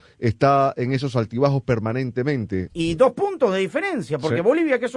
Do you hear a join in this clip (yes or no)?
yes